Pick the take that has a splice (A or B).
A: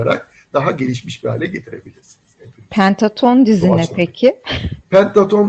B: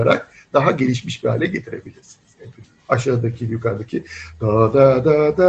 B